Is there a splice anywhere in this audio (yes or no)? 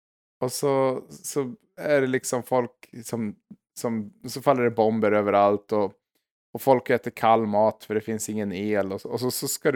no